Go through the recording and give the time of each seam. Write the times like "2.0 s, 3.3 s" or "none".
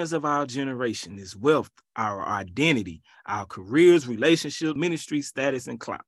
4.8 s